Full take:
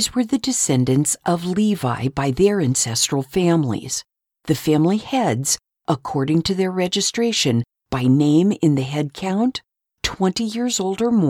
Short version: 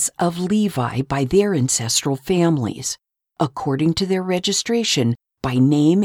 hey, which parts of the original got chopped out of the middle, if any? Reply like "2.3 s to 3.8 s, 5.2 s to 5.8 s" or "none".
4.3 s to 5.7 s